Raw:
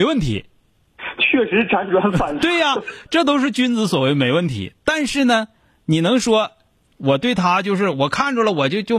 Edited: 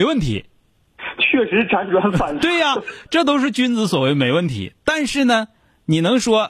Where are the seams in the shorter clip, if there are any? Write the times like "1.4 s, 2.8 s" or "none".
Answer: none